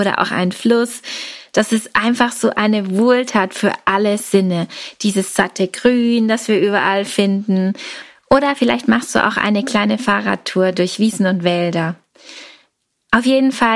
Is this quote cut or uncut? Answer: cut